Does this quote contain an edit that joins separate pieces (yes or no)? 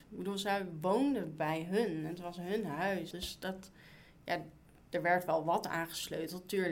yes